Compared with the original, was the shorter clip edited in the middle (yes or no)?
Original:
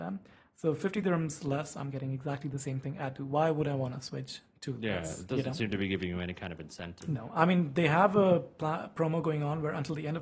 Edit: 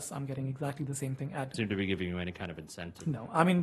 yes